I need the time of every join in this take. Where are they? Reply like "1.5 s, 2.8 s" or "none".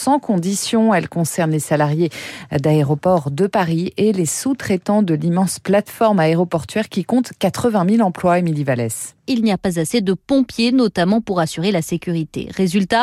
9.2 s